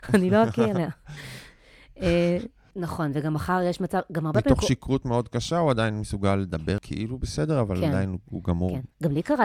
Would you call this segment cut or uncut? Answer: cut